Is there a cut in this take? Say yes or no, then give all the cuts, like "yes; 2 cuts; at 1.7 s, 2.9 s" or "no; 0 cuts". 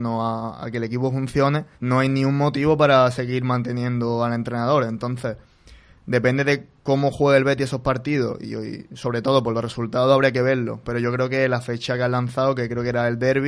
yes; 1 cut; at 1.7 s